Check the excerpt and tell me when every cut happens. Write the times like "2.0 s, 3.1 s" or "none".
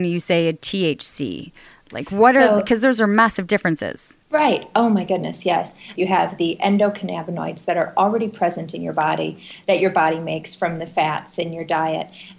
4.2 s, 6.0 s